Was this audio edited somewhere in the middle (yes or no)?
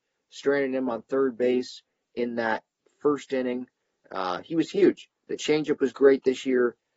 no